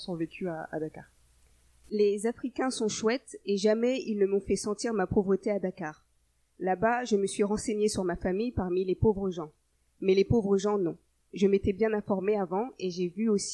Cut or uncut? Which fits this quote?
cut